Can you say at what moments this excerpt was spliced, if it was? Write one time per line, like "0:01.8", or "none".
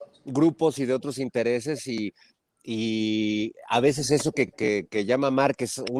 none